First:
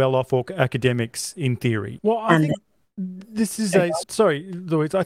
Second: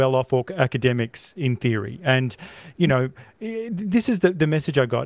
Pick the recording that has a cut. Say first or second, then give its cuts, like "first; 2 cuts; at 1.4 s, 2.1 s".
first; 2 cuts; at 2.0 s, 4.0 s